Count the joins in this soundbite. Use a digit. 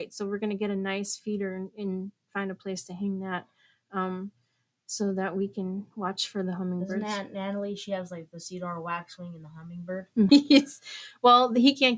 1